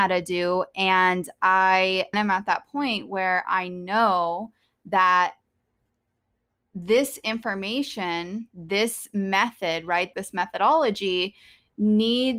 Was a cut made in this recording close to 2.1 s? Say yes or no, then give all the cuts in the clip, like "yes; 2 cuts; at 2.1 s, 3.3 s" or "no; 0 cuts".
yes; 2 cuts; at 2.1 s, 10.1 s